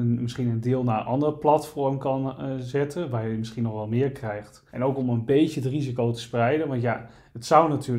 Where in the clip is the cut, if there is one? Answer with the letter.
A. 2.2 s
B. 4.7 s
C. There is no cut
B